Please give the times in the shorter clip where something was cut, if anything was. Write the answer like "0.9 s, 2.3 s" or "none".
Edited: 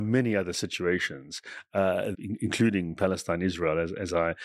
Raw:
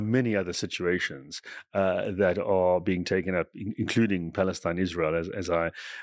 2.1 s